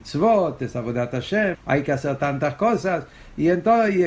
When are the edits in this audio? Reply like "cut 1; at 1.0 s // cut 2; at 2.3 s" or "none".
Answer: cut 1; at 1.5 s